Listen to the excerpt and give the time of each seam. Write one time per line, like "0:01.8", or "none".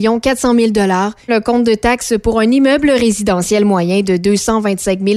0:01.3